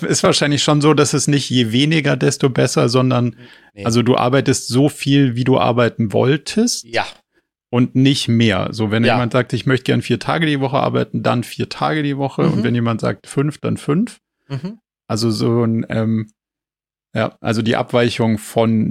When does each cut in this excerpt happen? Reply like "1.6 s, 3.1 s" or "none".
none